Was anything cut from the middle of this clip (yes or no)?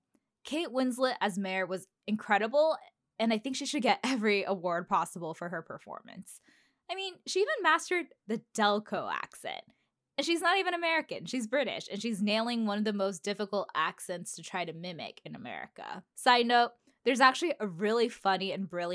yes